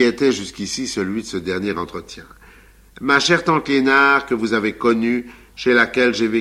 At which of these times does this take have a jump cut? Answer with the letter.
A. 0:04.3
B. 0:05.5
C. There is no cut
C